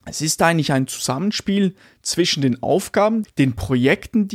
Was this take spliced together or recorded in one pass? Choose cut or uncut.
cut